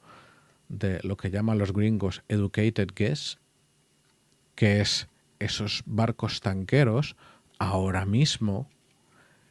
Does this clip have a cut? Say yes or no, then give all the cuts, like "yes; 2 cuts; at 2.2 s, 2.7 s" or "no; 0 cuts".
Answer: no; 0 cuts